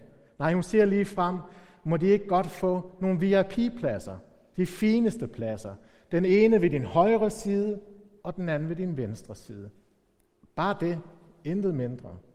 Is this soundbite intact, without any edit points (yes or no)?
yes